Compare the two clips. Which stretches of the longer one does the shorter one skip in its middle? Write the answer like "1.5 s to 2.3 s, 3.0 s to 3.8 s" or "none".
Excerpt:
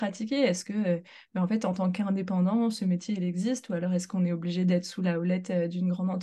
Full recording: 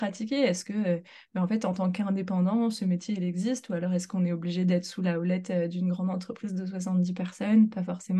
none